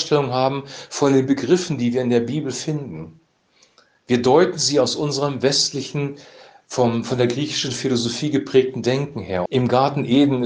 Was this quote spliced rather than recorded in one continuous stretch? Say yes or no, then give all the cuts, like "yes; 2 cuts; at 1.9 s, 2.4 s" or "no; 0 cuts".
yes; 1 cut; at 9.5 s